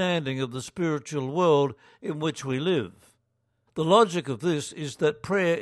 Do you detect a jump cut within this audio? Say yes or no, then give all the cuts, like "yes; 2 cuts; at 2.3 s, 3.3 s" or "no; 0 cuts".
yes; 1 cut; at 3.7 s